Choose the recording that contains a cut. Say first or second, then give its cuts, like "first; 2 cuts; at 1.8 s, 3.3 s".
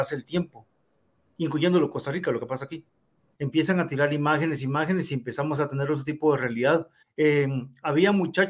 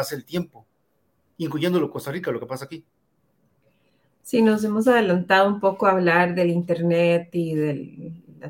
first; 2 cuts; at 3.3 s, 7.0 s